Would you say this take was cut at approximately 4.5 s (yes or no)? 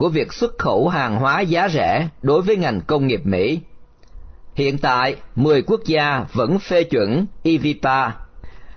yes